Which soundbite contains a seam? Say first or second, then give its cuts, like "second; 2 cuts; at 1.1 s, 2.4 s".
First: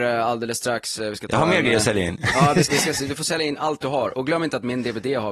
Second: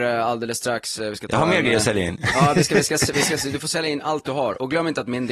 first; 1 cut; at 2.7 s